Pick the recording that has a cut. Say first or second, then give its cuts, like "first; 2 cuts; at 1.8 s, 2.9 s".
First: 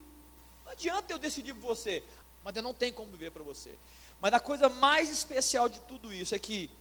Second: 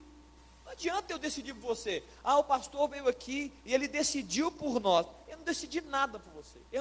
first; 1 cut; at 2.2 s